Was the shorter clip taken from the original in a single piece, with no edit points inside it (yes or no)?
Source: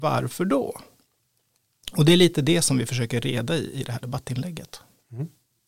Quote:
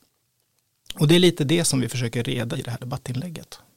no